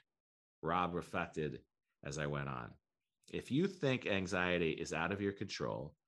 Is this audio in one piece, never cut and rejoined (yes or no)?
yes